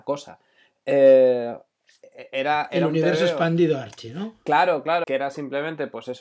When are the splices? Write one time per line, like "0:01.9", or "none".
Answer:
0:05.0